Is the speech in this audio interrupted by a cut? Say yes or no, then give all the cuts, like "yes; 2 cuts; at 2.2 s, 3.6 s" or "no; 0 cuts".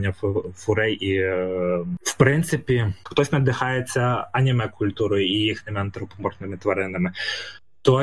yes; 1 cut; at 3.1 s